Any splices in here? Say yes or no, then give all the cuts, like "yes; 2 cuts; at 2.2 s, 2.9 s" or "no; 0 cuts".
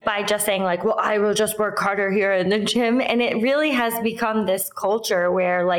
no; 0 cuts